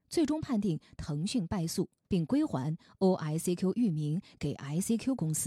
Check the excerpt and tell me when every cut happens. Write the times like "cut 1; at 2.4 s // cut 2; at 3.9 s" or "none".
cut 1; at 2.1 s